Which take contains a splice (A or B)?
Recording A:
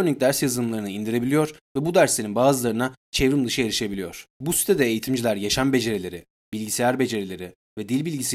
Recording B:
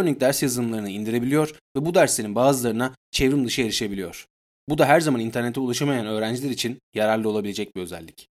A